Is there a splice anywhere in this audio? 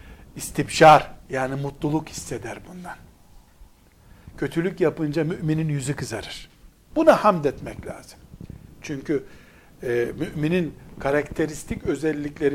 yes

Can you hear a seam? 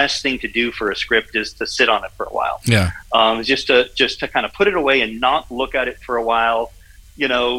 no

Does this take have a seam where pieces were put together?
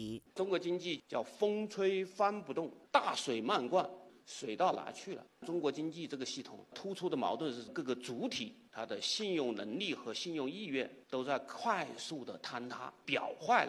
yes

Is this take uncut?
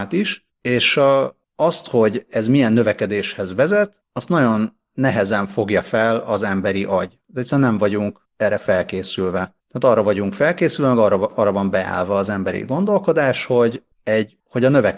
yes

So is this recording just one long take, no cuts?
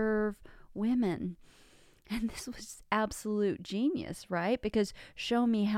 yes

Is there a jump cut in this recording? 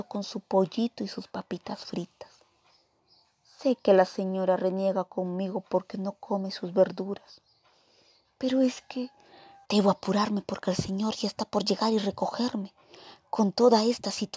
yes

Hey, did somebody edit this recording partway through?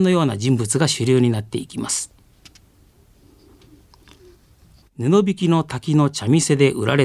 yes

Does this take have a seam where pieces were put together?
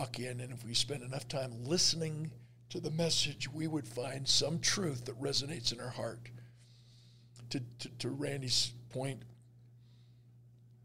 no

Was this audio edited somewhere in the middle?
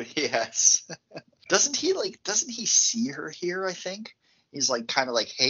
yes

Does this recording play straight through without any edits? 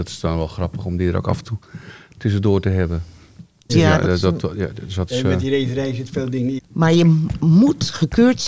no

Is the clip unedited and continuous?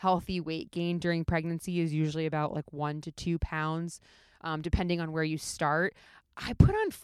yes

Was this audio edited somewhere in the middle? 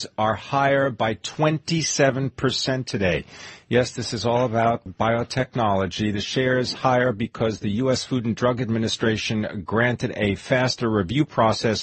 yes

